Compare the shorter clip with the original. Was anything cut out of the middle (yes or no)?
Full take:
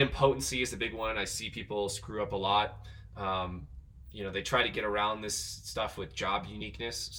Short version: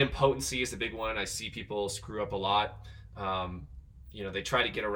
no